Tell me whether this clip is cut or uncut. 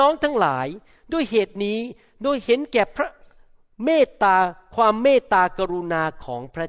uncut